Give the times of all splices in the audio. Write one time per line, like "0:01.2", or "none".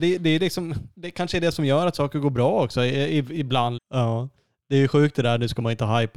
0:03.8